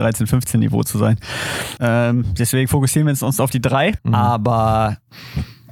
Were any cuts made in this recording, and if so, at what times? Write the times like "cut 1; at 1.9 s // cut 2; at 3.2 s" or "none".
cut 1; at 1.8 s // cut 2; at 4.0 s